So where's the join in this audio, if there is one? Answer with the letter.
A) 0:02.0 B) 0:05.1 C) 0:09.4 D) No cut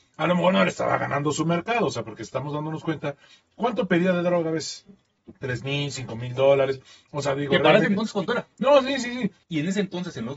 C